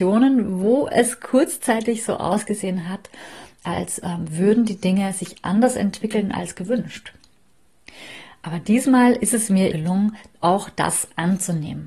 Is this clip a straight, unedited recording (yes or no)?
no